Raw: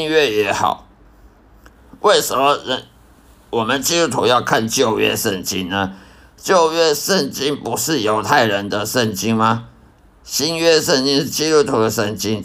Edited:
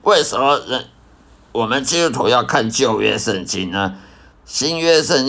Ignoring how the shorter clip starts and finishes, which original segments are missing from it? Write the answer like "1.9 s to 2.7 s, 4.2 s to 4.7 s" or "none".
6.3 s to 10.1 s